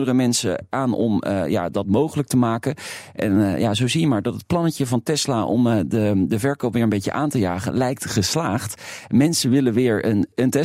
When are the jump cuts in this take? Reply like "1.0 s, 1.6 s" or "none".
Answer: none